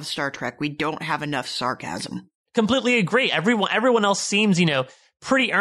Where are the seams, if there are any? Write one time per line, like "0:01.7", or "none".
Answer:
none